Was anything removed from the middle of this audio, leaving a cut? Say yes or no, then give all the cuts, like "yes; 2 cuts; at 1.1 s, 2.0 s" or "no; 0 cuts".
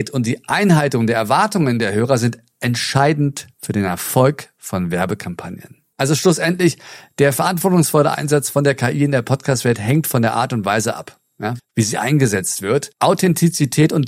yes; 1 cut; at 11.6 s